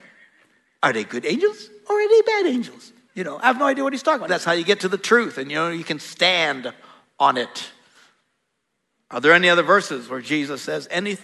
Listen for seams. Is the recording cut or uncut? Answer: cut